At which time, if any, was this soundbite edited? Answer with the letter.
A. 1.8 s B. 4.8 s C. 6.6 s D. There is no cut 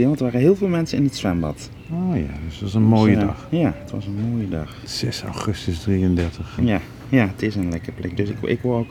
C